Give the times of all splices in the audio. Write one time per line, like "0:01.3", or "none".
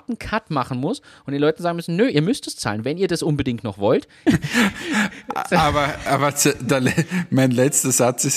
0:04.3